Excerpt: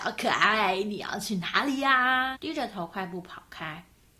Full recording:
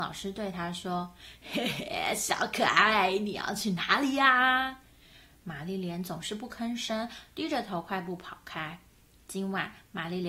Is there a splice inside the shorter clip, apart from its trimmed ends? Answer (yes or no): yes